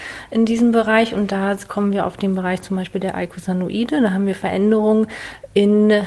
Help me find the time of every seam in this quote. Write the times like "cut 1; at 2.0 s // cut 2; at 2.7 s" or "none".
none